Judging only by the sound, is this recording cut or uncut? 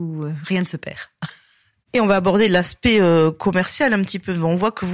uncut